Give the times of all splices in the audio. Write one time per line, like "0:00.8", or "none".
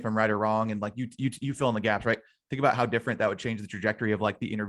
none